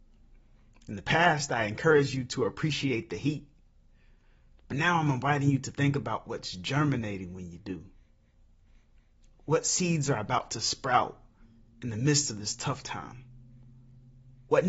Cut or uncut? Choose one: uncut